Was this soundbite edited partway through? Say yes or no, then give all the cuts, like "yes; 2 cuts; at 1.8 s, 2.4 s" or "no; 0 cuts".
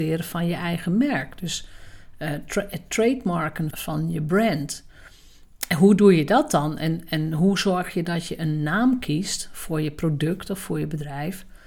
yes; 1 cut; at 3.7 s